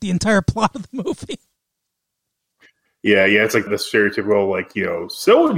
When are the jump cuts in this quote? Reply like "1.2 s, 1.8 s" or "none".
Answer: 3.7 s

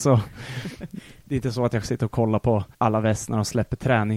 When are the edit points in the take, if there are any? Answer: 1.2 s, 2.7 s

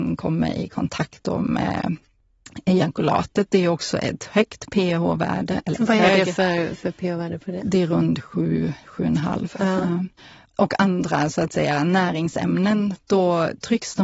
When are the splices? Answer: none

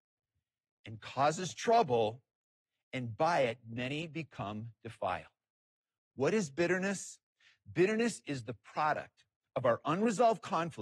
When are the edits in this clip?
none

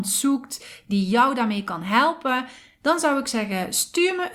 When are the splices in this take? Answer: none

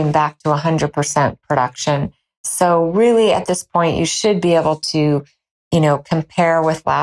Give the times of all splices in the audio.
none

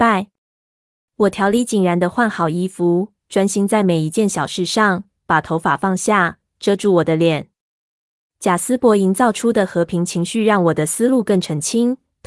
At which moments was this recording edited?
none

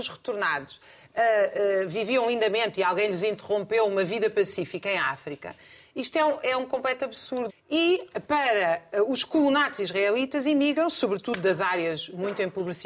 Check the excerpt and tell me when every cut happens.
6.4 s, 7.5 s

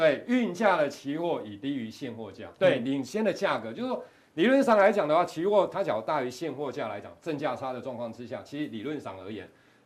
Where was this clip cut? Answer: 2.6 s

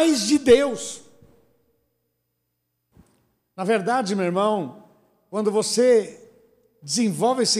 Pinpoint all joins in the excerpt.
none

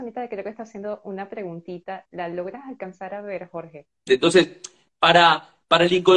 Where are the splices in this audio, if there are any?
4.1 s

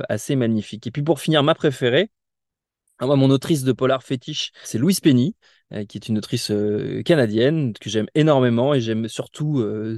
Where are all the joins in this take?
4.6 s

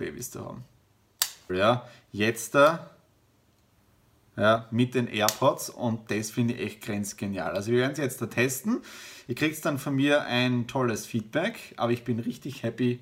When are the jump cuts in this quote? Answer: 1.5 s

